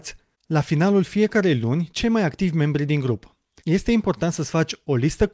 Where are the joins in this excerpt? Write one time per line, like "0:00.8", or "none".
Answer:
0:03.6